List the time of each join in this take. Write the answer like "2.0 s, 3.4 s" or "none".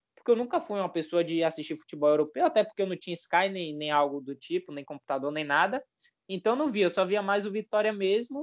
none